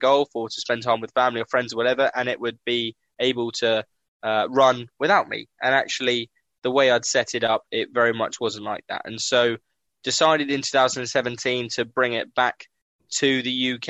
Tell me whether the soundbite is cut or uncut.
uncut